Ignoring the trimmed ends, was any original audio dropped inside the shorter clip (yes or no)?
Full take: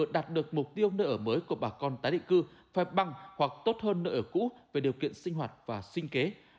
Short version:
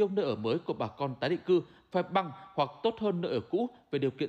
no